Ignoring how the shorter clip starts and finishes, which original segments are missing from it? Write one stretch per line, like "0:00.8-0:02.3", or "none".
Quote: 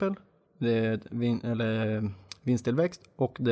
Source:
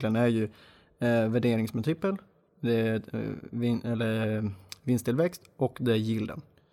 0:03.1-0:03.5